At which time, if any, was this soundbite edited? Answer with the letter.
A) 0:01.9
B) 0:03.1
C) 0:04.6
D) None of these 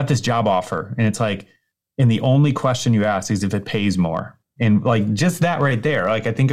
C